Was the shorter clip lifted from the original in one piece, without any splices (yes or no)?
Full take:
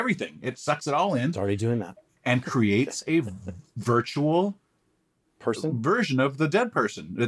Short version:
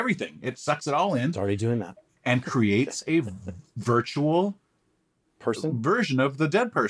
yes